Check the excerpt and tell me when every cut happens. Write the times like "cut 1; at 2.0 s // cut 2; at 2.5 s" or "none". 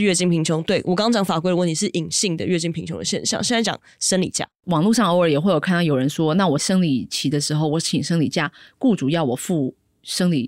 none